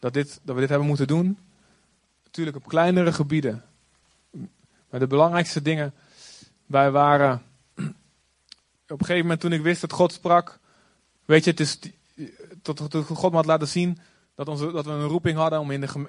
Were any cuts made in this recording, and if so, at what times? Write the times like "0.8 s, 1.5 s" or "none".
none